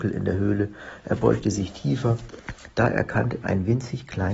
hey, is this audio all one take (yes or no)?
no